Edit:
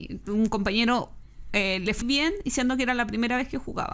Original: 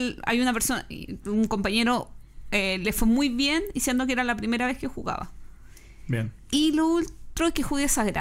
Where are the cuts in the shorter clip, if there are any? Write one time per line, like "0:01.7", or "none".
0:02.0